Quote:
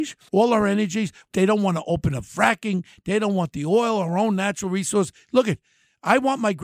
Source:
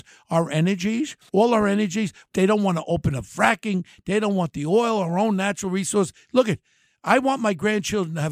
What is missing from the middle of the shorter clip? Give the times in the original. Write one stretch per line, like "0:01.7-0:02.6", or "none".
none